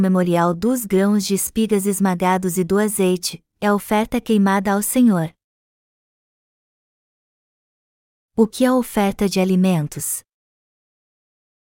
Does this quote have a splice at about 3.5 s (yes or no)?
yes